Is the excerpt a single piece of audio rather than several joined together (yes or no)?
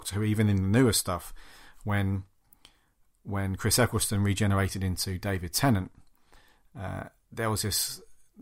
yes